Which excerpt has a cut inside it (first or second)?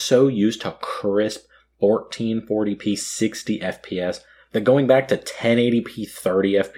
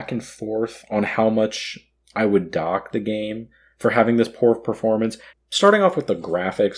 second